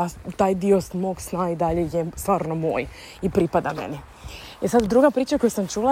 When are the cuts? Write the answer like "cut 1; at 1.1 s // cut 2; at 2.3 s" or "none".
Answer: none